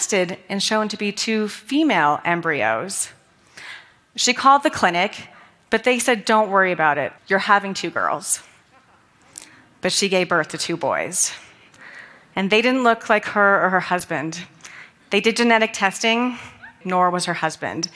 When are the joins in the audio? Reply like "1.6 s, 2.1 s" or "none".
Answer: 7.2 s, 16.8 s